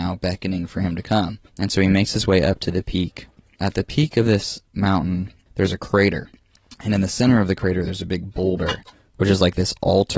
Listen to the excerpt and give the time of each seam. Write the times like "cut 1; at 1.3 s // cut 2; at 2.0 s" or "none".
none